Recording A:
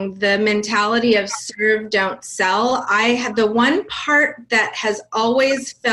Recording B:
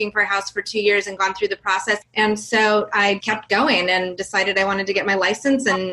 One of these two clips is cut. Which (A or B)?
B